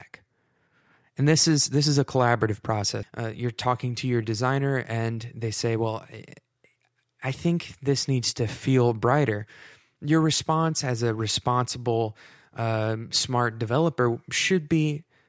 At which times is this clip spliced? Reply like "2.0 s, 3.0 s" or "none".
3.0 s